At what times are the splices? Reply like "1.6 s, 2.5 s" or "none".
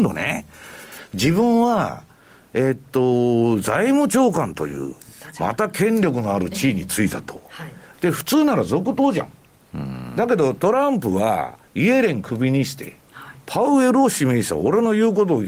7.9 s

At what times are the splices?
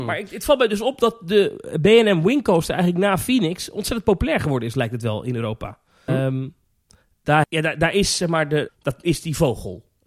6.1 s, 7.4 s, 8.7 s

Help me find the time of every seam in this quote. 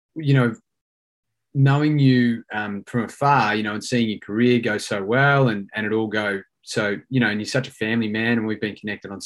5.7 s

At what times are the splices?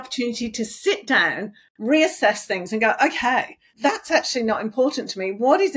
3.7 s

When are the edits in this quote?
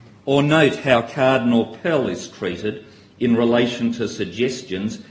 none

